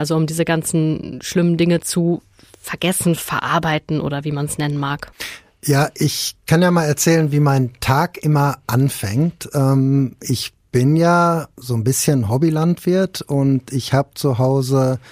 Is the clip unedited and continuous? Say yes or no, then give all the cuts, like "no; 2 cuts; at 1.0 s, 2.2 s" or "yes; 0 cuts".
yes; 0 cuts